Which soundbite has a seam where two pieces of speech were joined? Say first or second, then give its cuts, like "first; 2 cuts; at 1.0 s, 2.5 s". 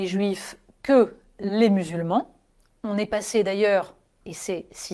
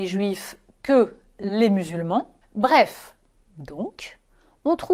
second; 1 cut; at 2.4 s